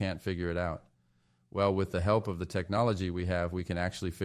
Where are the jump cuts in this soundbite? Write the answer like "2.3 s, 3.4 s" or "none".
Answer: none